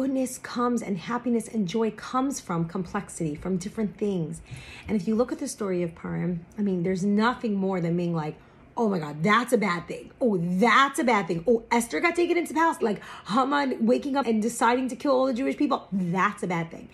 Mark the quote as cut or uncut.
cut